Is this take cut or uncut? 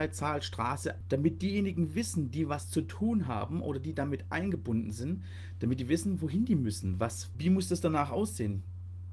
cut